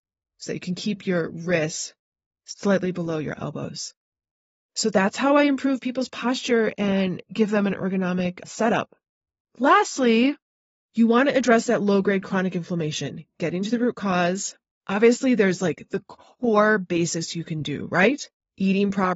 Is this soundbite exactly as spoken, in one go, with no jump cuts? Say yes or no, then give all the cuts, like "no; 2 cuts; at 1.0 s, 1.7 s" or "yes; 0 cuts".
yes; 0 cuts